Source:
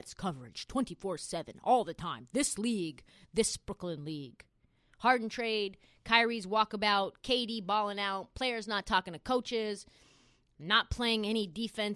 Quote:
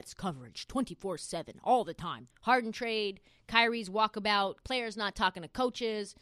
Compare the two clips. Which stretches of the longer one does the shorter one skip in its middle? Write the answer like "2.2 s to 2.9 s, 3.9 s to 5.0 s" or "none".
2.3 s to 4.9 s, 7.2 s to 8.3 s